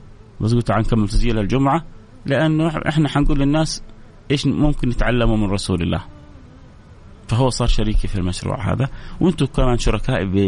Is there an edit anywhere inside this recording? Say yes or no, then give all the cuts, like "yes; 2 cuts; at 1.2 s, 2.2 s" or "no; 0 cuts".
yes; 1 cut; at 7.2 s